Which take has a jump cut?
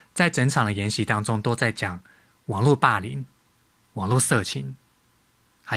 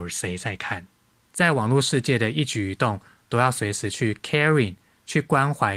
second; 1 cut; at 1.2 s

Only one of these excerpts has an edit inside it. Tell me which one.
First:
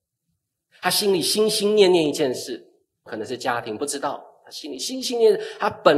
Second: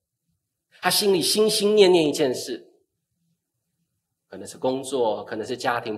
first; 1 cut; at 3.1 s

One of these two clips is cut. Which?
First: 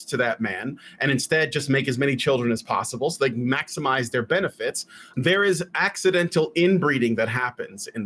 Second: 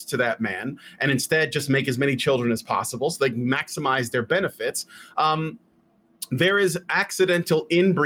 first; 1 cut; at 5.1 s

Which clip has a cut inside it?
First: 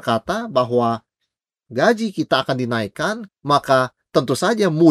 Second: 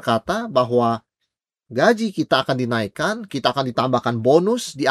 first; 1 cut; at 3.3 s

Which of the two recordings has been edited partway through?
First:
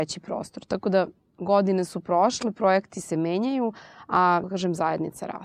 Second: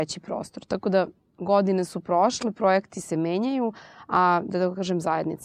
first; 1 cut; at 4.4 s

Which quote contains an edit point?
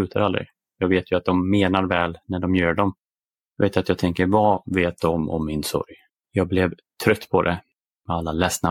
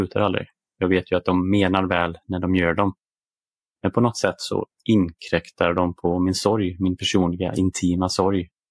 first; 2 cuts; at 3.3 s, 6.1 s

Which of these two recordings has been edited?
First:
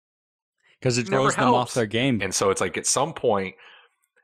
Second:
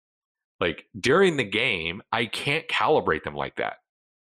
first; 2 cuts; at 1.0 s, 2.2 s

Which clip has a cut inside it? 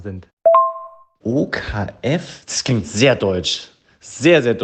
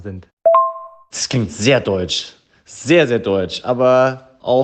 second; 1 cut; at 1.1 s

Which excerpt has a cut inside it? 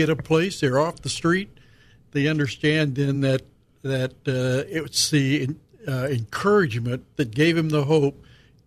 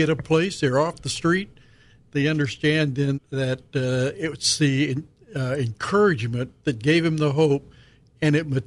second; 1 cut; at 3.1 s

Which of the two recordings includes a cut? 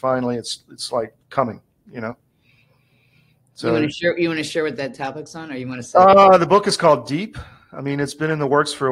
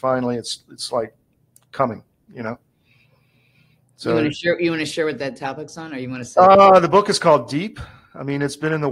first; 1 cut; at 1.2 s

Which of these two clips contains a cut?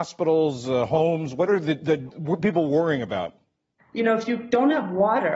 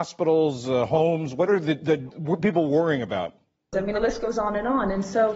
second; 1 cut; at 3.7 s

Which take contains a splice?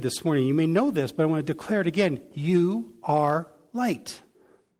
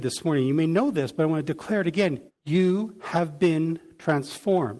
second; 1 cut; at 2.3 s

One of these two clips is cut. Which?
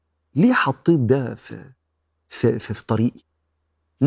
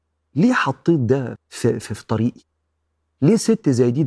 second; 1 cut; at 1.4 s

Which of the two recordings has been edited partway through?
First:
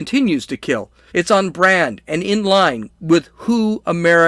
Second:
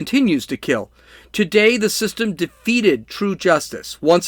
first; 1 cut; at 1.1 s

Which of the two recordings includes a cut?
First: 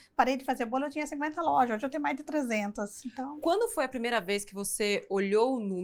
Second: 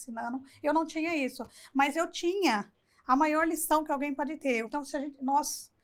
second; 1 cut; at 4.6 s

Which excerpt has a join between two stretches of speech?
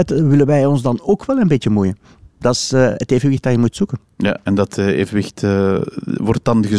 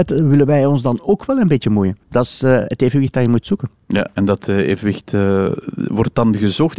second; 1 cut; at 2.0 s

